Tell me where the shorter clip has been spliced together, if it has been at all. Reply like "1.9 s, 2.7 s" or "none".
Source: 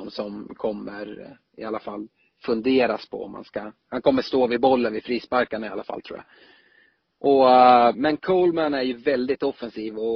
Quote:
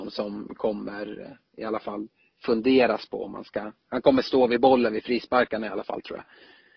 none